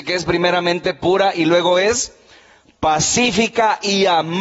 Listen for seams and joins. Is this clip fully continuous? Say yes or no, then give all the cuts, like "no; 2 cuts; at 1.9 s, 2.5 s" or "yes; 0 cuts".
yes; 0 cuts